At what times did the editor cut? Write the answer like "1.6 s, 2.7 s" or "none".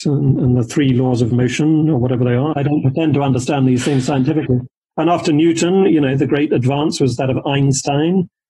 2.5 s